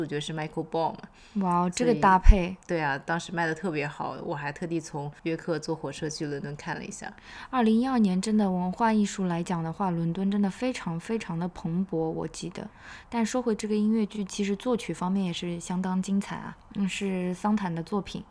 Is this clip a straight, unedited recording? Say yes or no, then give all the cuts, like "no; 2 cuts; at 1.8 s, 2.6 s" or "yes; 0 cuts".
yes; 0 cuts